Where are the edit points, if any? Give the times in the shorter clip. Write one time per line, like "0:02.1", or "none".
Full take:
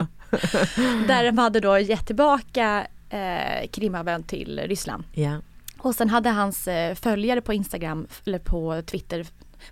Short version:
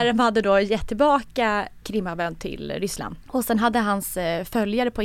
0:01.8
0:03.2